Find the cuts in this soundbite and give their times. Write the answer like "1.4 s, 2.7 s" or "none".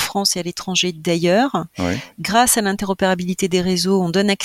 none